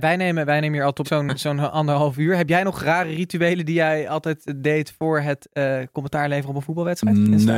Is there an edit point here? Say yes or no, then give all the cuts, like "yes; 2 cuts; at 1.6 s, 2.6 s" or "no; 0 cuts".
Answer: yes; 1 cut; at 1.0 s